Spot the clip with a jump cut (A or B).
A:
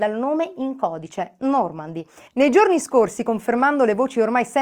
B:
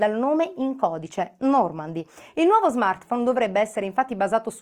A